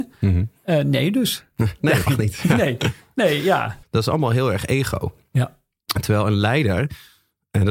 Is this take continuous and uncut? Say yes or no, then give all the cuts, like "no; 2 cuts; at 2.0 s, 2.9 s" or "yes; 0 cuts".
no; 2 cuts; at 2.1 s, 3.8 s